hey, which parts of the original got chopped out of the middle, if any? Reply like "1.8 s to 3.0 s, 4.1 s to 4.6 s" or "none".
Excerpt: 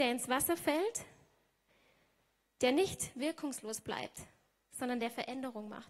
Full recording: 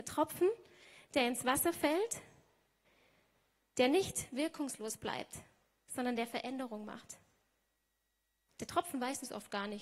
none